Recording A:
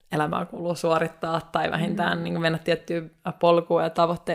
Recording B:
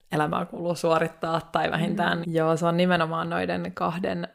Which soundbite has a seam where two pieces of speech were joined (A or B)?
B